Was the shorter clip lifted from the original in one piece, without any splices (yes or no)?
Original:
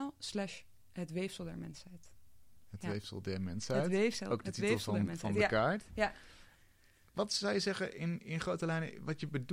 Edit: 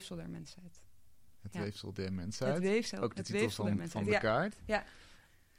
yes